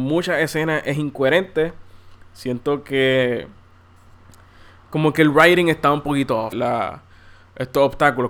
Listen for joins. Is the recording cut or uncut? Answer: cut